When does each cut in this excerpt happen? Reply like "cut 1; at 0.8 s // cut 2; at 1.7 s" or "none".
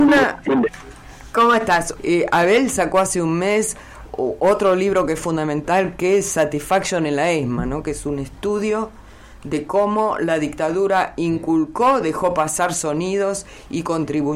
cut 1; at 2.0 s